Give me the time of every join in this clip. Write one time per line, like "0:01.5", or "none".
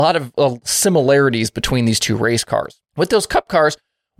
0:02.9